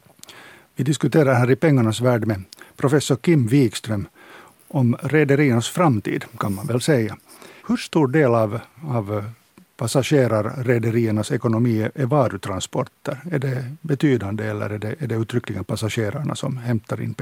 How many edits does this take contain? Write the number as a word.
one